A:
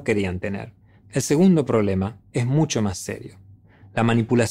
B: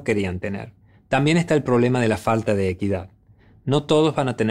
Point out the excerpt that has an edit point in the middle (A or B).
A